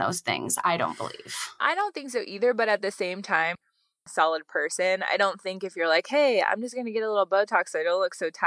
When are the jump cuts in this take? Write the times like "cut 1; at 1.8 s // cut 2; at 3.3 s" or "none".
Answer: cut 1; at 4.1 s